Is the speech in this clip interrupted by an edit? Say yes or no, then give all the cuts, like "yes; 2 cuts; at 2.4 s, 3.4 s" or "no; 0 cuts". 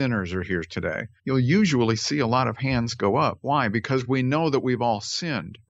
yes; 1 cut; at 1.2 s